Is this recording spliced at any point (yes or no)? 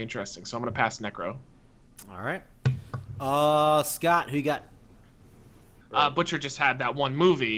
yes